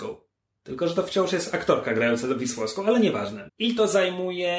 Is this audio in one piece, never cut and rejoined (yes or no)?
no